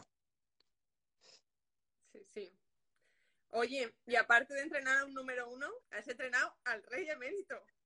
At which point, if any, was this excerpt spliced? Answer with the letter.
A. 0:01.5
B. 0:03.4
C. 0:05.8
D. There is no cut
C